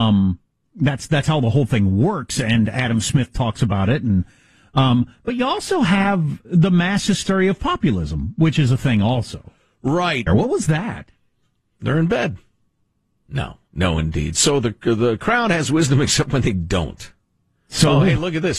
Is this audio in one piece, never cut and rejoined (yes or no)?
no